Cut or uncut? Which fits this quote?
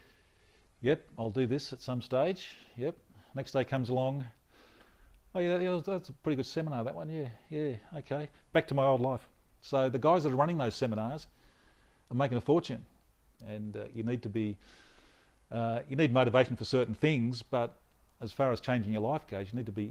cut